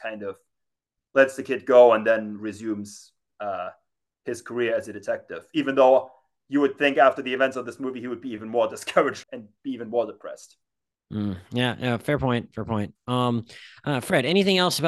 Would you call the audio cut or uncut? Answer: cut